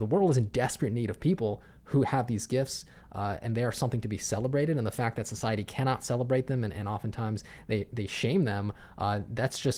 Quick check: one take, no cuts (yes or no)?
yes